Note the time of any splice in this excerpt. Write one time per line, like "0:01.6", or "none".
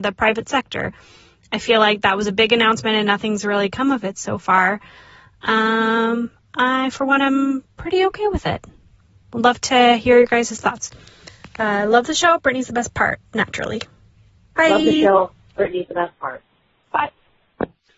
none